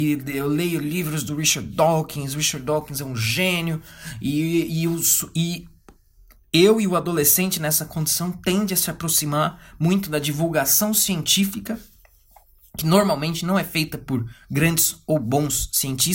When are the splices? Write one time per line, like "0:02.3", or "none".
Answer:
none